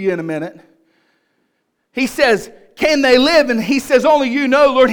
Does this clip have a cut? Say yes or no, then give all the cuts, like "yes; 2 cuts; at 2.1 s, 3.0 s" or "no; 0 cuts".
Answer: no; 0 cuts